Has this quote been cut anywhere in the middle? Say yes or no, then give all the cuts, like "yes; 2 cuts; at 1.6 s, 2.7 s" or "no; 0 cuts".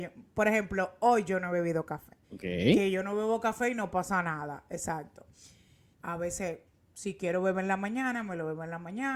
yes; 2 cuts; at 2.2 s, 5.9 s